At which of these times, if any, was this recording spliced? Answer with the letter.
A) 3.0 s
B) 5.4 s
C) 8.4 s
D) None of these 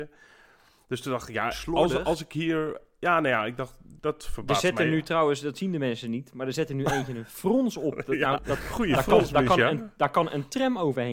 C